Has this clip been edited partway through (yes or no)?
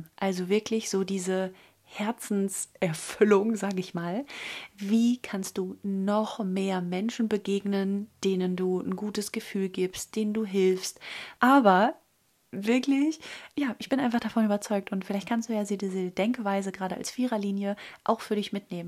yes